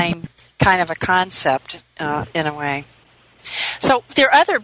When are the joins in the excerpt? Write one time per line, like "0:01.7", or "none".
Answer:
none